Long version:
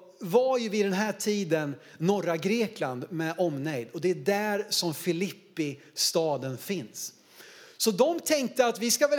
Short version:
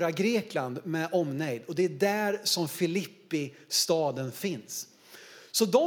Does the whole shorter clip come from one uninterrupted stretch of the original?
yes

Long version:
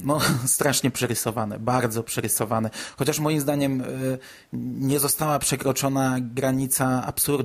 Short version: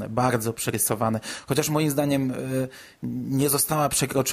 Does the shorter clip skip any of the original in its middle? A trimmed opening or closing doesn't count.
no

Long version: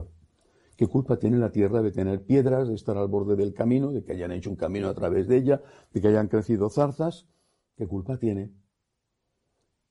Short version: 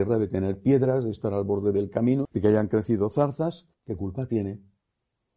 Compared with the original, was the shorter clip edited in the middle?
yes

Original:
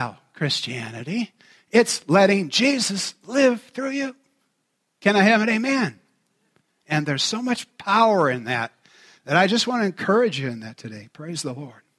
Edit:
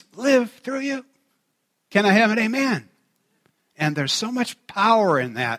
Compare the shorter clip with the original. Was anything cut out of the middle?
no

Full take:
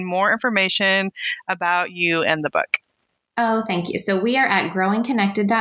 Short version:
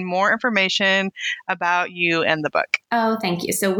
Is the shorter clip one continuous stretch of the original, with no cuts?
no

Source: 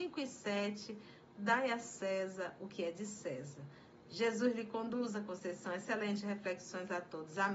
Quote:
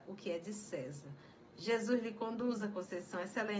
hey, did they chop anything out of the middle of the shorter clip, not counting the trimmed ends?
no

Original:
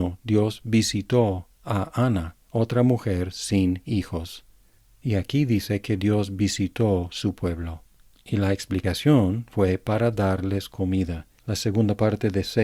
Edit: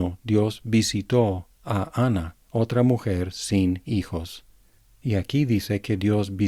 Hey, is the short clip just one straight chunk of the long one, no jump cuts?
yes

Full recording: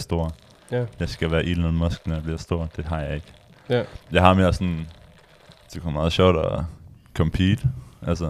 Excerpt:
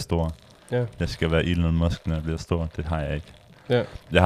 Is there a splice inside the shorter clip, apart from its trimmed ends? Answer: no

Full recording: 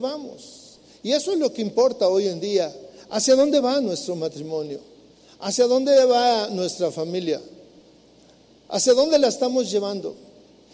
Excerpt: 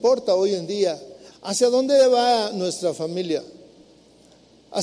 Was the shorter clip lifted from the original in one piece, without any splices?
no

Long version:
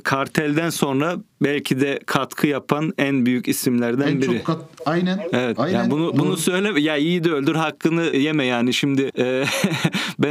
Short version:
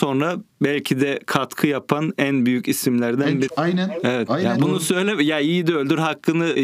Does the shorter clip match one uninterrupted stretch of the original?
no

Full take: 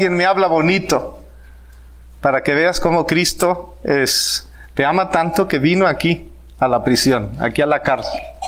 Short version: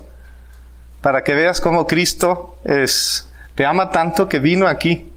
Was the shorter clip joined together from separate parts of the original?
no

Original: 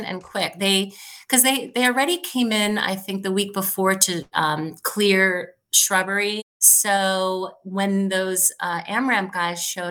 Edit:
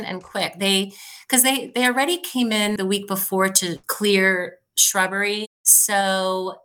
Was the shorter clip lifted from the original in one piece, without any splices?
no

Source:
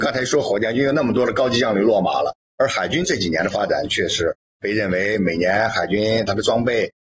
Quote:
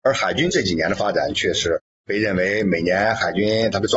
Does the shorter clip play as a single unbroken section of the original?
yes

